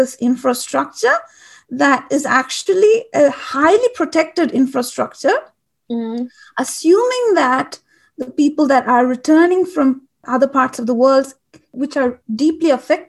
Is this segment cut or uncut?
uncut